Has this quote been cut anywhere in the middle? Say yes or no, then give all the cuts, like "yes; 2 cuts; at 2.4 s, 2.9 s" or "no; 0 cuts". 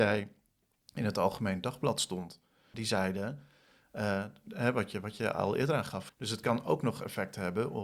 yes; 2 cuts; at 2.7 s, 6.1 s